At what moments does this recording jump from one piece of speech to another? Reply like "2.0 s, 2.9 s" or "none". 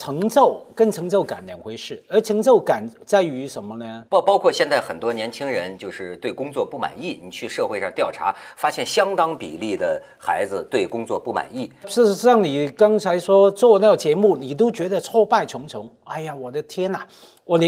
4.1 s, 11.8 s